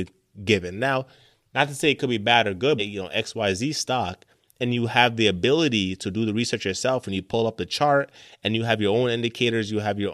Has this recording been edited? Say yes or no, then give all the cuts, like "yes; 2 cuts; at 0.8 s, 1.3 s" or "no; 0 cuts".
yes; 1 cut; at 2.8 s